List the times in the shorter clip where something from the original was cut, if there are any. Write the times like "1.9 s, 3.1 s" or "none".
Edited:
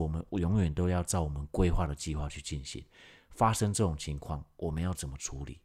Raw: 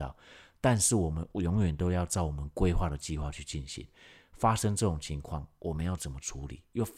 none